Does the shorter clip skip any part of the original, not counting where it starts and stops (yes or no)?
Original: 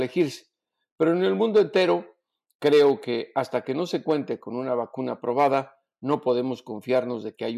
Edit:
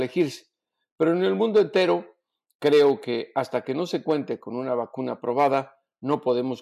no